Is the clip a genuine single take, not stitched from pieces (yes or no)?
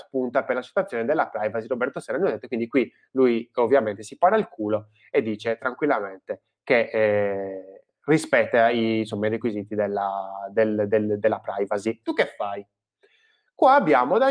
no